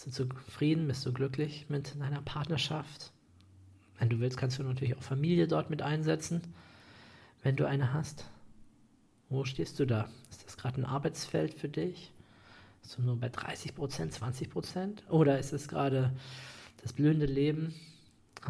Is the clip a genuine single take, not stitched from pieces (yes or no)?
yes